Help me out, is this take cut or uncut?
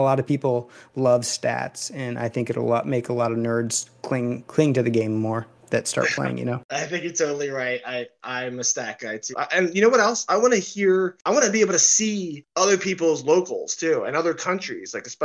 cut